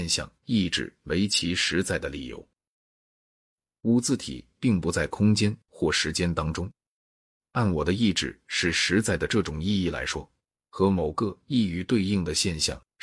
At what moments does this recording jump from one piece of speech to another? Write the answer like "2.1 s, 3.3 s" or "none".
3.7 s, 7.4 s, 10.5 s